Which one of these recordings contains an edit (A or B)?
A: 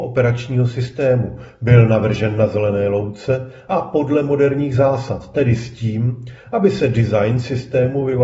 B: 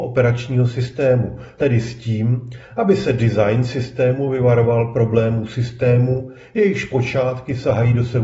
B